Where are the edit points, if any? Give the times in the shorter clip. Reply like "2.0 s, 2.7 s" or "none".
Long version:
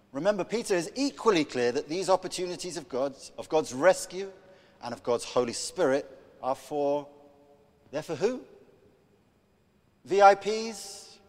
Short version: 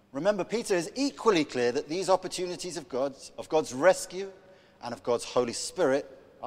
none